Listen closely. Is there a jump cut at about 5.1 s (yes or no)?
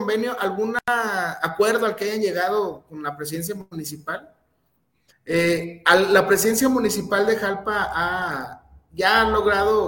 yes